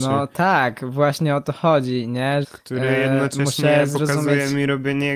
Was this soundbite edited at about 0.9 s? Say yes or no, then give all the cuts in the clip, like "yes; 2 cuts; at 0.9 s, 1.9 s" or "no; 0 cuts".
no; 1 cut; at 2.4 s